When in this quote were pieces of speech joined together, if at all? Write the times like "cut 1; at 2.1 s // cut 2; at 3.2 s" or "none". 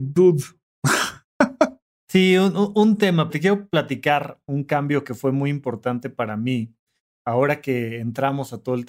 cut 1; at 3.3 s